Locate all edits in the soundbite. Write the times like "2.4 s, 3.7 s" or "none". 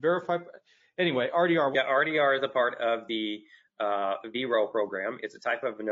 1.7 s